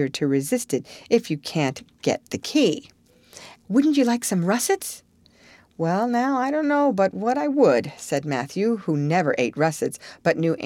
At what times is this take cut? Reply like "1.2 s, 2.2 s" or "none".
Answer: 3.6 s